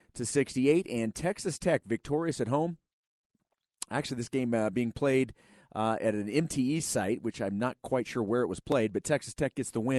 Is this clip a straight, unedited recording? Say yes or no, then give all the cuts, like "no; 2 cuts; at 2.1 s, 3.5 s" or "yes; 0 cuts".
yes; 0 cuts